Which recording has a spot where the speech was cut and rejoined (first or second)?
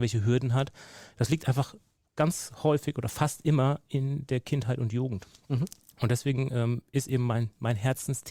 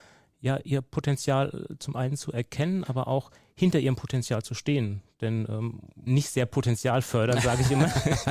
second